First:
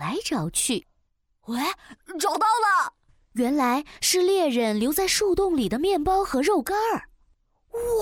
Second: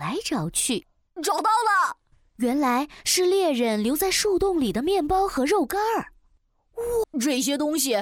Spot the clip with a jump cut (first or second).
second